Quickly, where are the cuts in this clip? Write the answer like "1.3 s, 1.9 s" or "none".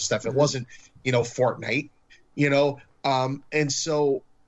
none